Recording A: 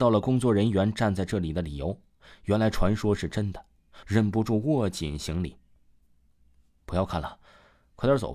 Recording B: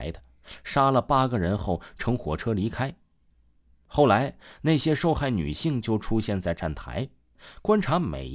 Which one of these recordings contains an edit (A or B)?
A